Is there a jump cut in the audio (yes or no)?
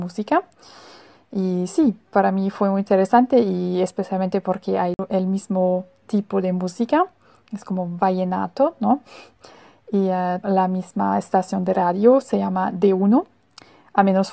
yes